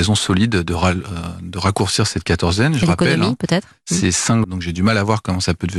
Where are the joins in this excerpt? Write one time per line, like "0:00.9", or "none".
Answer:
0:04.4